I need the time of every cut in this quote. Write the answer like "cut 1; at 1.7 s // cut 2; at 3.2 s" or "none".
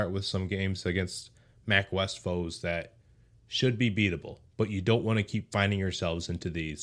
cut 1; at 4.5 s